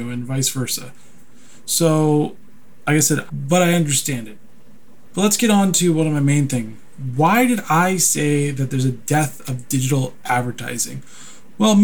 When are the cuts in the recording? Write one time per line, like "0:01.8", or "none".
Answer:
0:03.3